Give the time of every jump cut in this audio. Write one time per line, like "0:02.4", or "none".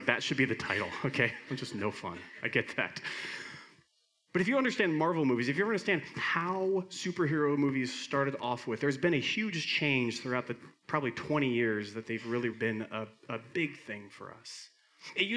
0:12.5